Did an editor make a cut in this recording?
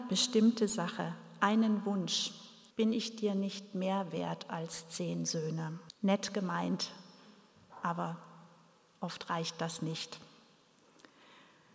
yes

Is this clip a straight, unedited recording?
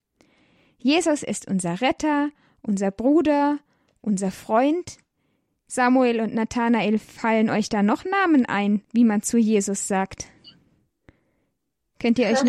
no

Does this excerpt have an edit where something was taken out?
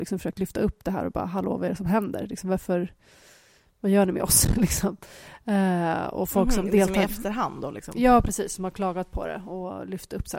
no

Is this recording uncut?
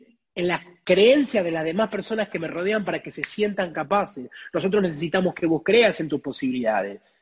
yes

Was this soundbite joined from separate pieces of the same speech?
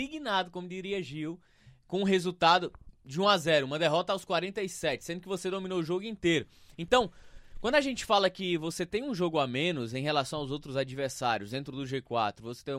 no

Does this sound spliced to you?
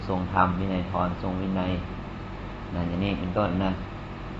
no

